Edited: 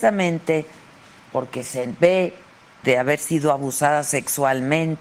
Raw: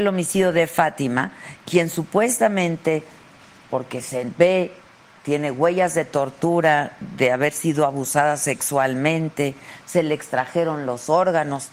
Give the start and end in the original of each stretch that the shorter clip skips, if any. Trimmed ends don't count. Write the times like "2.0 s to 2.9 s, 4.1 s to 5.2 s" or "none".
5.2 s to 7.2 s